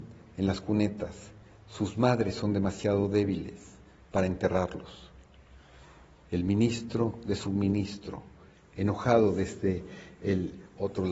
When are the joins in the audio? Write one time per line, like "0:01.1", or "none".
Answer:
none